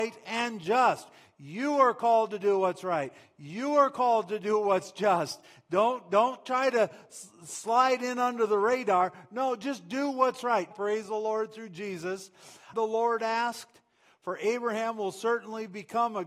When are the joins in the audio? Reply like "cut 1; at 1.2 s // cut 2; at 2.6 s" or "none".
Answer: cut 1; at 10.7 s // cut 2; at 12.7 s